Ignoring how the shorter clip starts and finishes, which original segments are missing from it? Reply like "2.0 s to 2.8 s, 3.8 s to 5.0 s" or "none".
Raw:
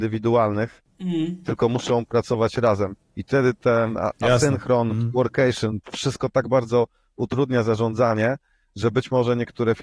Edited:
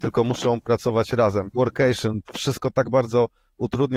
3.0 s to 5.1 s